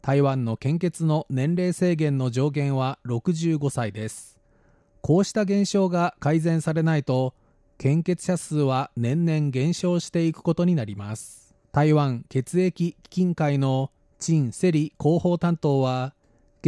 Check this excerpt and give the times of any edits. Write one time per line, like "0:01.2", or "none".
0:11.6